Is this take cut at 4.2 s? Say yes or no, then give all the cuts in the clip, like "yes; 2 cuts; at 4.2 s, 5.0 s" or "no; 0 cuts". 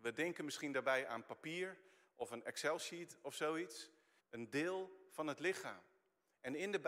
yes; 1 cut; at 4.2 s